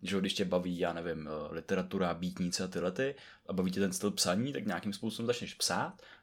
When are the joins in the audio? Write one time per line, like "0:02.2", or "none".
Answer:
none